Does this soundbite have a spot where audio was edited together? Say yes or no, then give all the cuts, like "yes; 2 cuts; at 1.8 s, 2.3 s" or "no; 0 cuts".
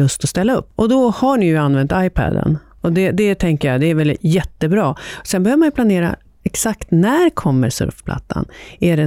no; 0 cuts